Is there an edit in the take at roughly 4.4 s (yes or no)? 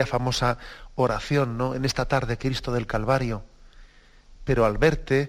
yes